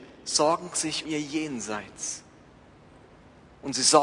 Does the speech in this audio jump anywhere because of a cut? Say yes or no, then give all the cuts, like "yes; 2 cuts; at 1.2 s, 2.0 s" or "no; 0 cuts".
yes; 1 cut; at 1.0 s